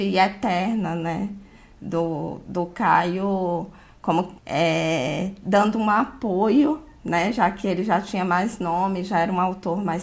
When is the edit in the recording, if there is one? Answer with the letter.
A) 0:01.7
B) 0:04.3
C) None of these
B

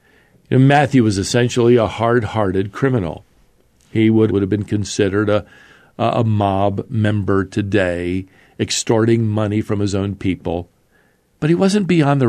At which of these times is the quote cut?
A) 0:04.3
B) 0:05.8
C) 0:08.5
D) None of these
A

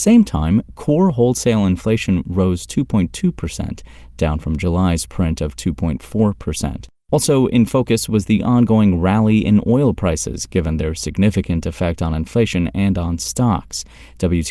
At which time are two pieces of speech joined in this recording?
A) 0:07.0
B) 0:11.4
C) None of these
A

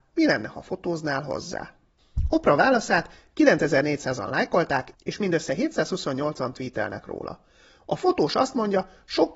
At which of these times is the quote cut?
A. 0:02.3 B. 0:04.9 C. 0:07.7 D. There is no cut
D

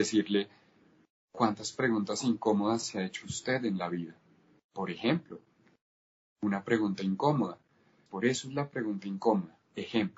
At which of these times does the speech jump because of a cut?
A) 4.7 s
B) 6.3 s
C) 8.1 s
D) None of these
C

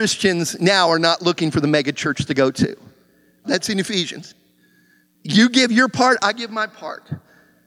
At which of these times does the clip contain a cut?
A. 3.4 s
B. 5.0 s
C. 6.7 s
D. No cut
A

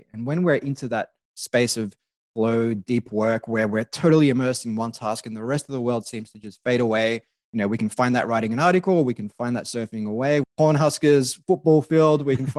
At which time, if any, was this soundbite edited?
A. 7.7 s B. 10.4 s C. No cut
B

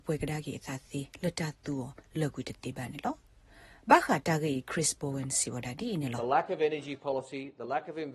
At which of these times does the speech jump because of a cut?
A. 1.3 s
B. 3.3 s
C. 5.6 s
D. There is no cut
D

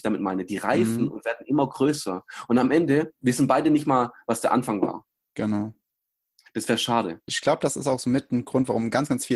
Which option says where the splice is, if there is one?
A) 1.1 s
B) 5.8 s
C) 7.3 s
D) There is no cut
C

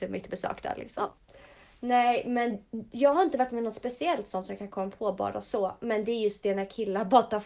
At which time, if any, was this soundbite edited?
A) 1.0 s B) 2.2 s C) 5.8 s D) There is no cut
D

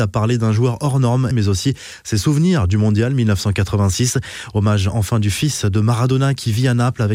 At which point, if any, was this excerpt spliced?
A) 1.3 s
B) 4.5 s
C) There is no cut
A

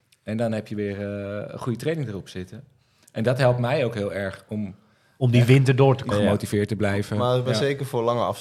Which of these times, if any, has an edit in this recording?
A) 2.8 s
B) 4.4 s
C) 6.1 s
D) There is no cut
C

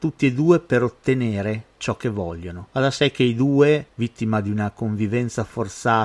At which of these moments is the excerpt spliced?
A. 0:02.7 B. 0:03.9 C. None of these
A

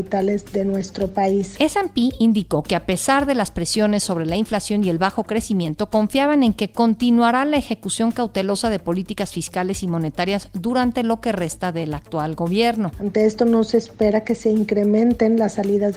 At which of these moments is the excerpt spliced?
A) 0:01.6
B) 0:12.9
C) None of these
B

